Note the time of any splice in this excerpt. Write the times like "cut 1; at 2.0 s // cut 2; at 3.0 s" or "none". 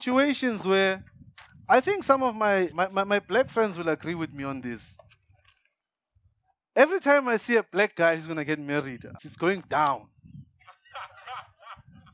cut 1; at 2.7 s // cut 2; at 9.2 s